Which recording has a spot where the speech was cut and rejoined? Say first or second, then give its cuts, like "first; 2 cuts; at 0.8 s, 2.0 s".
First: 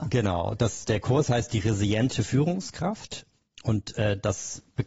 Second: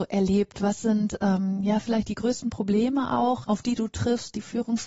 second; 1 cut; at 3.4 s